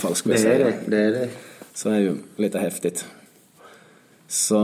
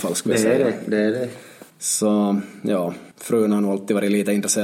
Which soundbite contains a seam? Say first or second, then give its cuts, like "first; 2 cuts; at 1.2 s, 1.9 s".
second; 2 cuts; at 1.7 s, 3.1 s